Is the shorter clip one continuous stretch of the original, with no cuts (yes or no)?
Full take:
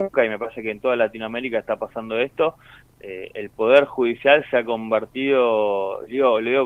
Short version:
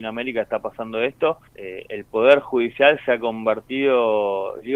no